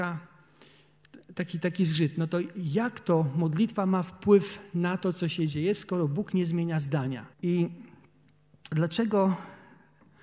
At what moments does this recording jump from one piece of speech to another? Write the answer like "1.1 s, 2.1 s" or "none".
7.3 s